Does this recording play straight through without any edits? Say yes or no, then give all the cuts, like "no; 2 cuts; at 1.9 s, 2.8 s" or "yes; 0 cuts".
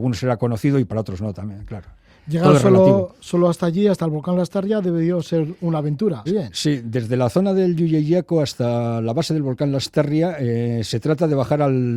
no; 1 cut; at 6.3 s